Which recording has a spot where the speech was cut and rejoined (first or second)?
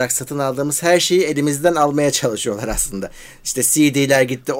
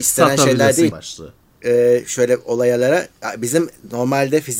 second